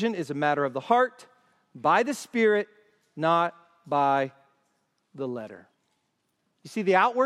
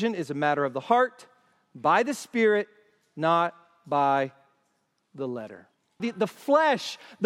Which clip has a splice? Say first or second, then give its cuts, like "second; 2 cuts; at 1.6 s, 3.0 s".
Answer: second; 1 cut; at 6.0 s